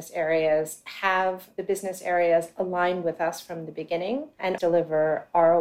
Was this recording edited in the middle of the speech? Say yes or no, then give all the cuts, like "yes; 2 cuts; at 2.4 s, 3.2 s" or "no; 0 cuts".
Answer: yes; 1 cut; at 4.6 s